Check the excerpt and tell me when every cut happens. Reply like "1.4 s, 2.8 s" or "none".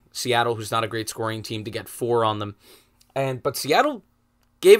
none